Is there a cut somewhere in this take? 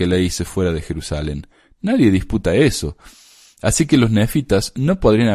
no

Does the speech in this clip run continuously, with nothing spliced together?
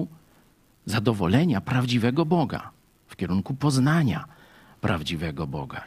yes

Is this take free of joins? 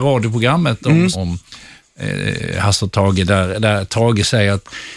no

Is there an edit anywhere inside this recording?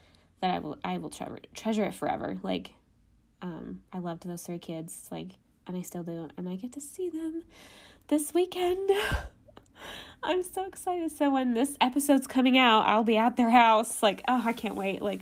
no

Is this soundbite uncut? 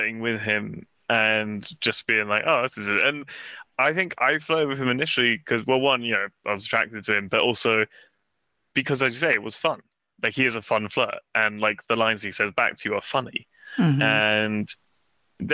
yes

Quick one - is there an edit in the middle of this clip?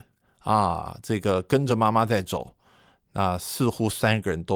no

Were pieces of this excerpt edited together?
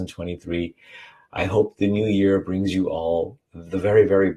yes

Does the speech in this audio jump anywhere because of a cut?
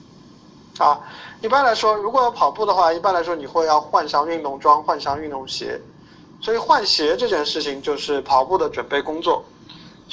no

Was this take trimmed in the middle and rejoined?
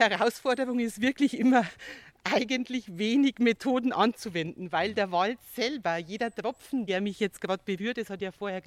no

